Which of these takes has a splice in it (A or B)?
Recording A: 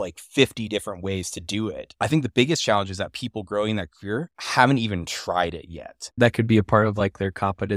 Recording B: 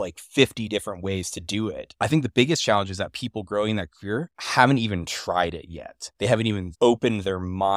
A